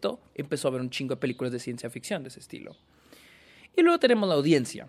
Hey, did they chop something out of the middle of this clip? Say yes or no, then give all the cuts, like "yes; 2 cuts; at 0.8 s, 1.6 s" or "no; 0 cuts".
no; 0 cuts